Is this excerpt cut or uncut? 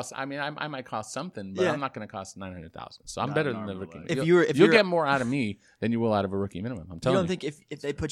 uncut